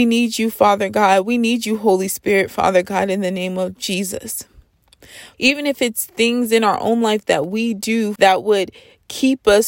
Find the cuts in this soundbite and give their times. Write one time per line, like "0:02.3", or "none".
0:05.3
0:08.2